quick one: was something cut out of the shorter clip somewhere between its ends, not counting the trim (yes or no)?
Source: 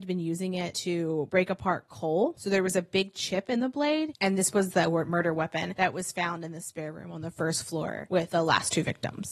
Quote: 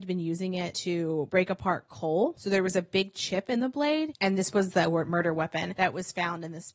no